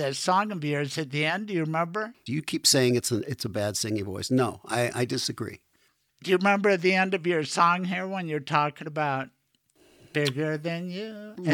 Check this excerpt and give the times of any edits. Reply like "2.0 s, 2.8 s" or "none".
2.3 s